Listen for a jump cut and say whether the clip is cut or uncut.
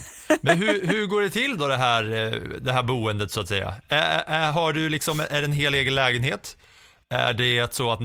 uncut